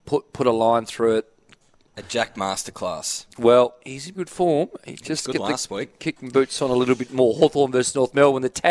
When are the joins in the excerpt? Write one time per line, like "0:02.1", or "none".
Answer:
0:01.9
0:04.1